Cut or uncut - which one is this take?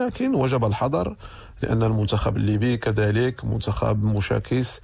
uncut